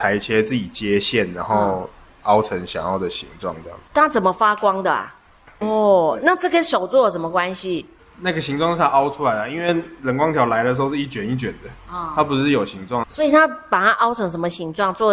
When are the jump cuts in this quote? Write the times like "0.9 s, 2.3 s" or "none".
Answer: 5.6 s, 13.0 s